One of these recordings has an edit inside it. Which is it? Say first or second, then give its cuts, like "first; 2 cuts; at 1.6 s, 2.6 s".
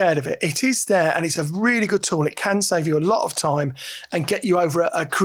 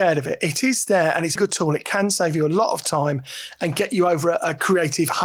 second; 1 cut; at 1.4 s